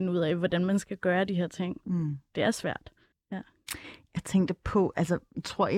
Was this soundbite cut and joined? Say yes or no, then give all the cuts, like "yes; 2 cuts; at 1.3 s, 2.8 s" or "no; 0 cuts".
yes; 1 cut; at 3.1 s